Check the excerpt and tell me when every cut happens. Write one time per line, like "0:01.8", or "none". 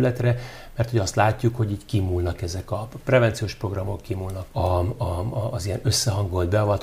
0:04.5